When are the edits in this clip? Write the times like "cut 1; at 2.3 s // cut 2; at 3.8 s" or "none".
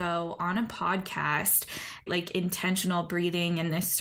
cut 1; at 2.1 s